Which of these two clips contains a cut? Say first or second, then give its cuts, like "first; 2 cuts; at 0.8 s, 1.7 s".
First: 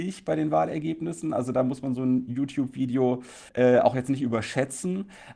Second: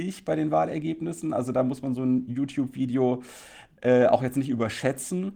first; 1 cut; at 3.5 s